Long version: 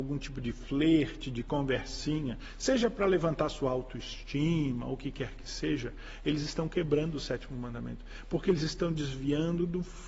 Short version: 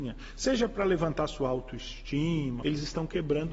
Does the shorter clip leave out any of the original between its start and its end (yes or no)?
yes